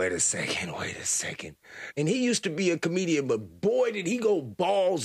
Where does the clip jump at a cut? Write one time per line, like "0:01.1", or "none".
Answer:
0:01.9